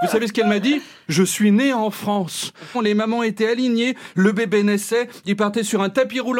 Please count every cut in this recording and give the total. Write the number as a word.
one